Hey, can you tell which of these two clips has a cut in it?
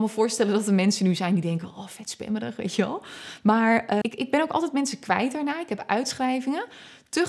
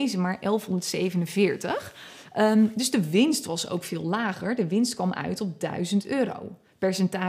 first; 1 cut; at 4.0 s

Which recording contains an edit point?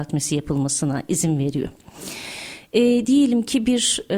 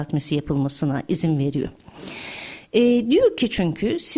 first; 1 cut; at 3.0 s

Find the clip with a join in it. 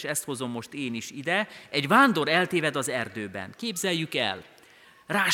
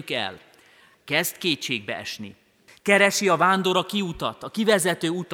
second; 2 cuts; at 0.9 s, 2.7 s

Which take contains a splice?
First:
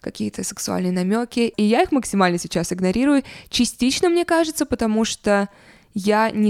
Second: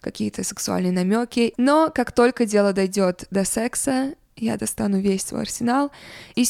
second; 1 cut; at 1.6 s

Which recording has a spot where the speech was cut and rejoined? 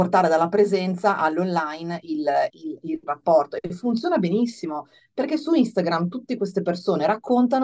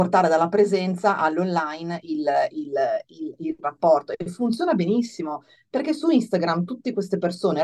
first; 1 cut; at 2.5 s

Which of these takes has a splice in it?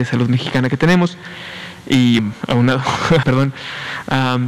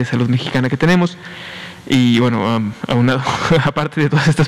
first; 2 cuts; at 2.2 s, 3.2 s

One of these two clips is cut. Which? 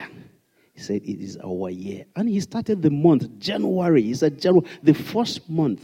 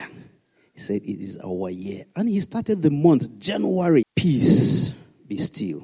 second; 1 cut; at 4.0 s

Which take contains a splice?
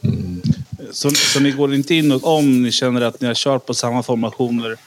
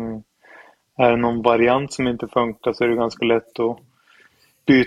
first; 1 cut; at 2.2 s

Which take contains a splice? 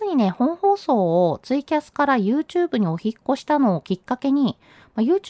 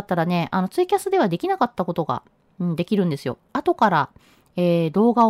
first; 1 cut; at 3.4 s

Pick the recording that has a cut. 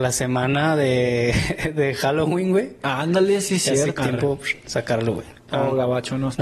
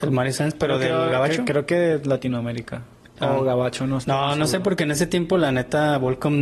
first; 2 cuts; at 4.0 s, 5.3 s

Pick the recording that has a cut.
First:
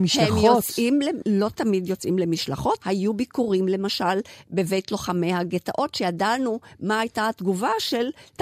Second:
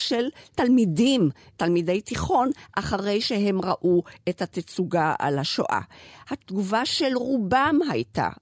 first; 1 cut; at 2.8 s

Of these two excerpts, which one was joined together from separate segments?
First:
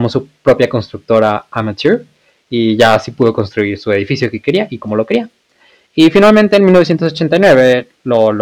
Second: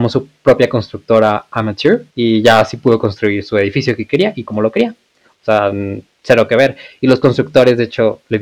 second; 2 cuts; at 2.1 s, 5.2 s

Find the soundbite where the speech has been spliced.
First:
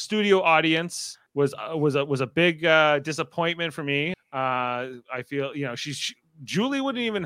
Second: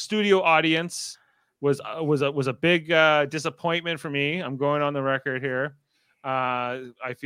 first; 2 cuts; at 1.3 s, 4.1 s

